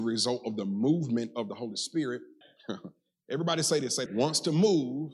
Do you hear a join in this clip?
yes; 2 cuts; at 2.4 s, 4.1 s

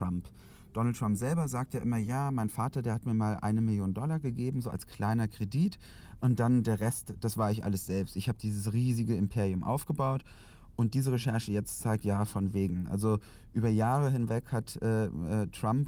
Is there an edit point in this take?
no; 0 cuts

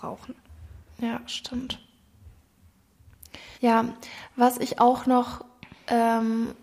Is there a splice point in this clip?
yes; 1 cut; at 3.5 s

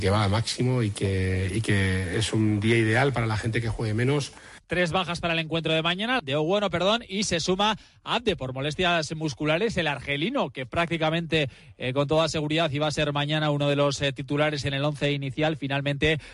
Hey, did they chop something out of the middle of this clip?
yes; 2 cuts; at 4.6 s, 6.2 s

